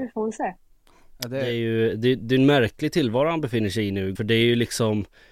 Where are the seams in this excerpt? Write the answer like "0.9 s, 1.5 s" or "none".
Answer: 4.1 s